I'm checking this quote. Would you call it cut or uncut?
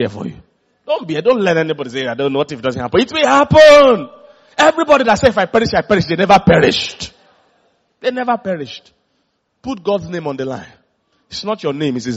uncut